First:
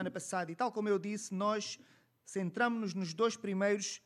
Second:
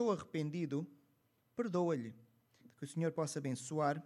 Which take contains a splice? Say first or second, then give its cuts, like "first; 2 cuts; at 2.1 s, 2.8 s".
second; 1 cut; at 2.6 s